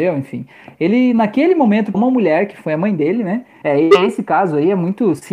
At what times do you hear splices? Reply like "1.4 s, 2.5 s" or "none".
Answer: 1.9 s, 3.6 s